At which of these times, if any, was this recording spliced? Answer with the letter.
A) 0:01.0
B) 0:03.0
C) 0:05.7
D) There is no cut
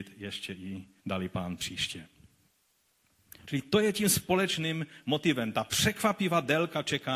A